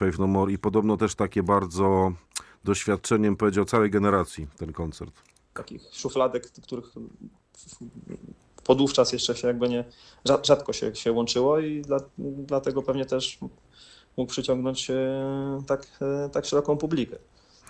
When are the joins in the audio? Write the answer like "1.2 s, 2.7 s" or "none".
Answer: 5.5 s